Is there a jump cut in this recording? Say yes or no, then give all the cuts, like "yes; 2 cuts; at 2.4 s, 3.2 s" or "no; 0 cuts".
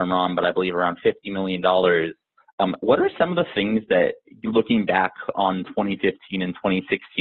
no; 0 cuts